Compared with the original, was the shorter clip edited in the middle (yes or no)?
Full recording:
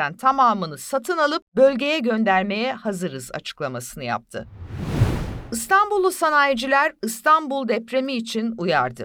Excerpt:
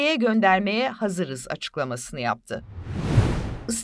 no